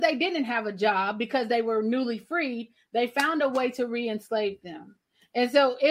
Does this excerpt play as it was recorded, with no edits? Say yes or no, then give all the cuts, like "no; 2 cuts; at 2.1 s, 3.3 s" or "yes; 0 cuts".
yes; 0 cuts